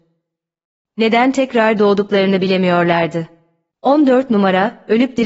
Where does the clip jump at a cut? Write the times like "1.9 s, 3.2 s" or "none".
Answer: 3.7 s